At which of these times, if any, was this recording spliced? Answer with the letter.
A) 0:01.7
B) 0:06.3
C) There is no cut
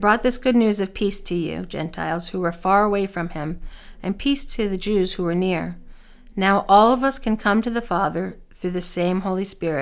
C